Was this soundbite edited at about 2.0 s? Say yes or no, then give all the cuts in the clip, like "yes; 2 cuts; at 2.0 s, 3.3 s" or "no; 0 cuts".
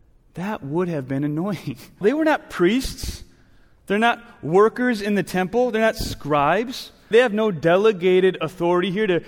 yes; 2 cuts; at 2.0 s, 7.1 s